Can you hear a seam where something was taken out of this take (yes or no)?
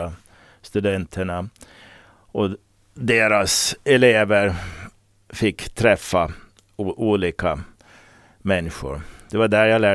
no